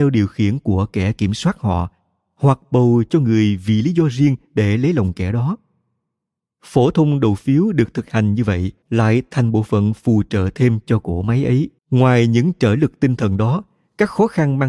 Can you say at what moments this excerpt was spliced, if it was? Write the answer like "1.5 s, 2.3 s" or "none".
8.8 s, 11.8 s